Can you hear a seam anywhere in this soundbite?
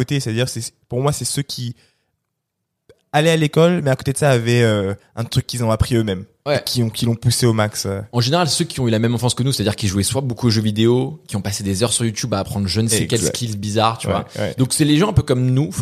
no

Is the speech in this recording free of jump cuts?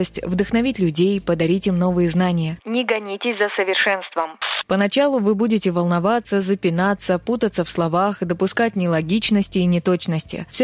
no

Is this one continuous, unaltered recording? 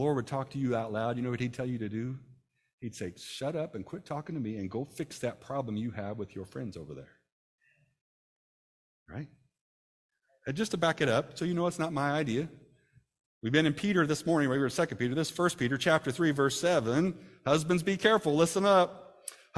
yes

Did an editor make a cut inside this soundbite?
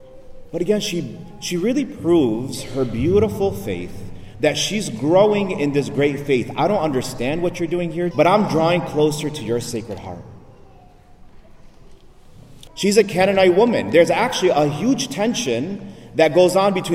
yes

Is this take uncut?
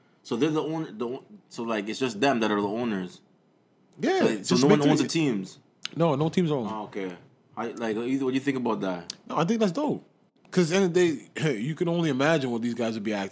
yes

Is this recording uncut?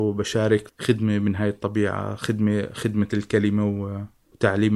yes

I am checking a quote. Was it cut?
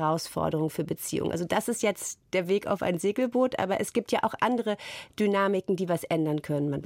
no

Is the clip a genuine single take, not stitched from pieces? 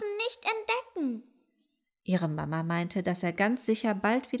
yes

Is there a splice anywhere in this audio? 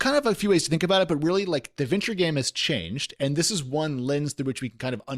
no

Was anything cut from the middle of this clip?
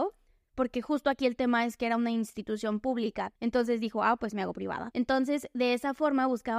no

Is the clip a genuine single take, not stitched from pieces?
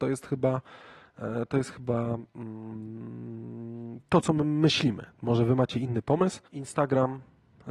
no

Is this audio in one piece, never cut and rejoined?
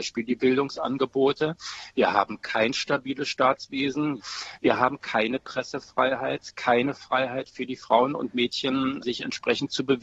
yes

